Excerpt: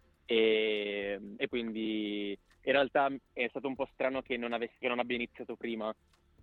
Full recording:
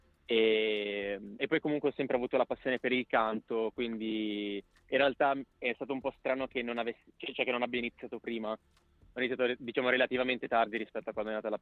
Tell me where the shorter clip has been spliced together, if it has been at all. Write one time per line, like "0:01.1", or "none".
0:01.5
0:04.8